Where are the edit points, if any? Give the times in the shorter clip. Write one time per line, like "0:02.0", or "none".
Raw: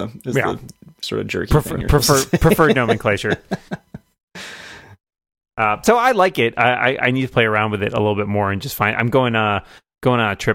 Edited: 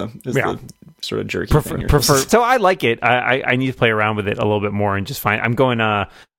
0:02.3